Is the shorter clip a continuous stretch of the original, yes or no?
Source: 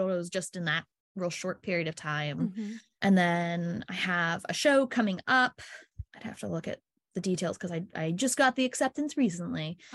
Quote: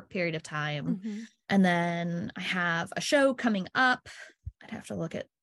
yes